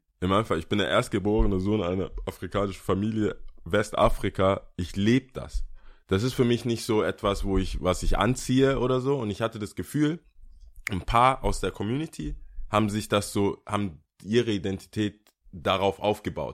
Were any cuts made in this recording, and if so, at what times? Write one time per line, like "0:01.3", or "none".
0:15.4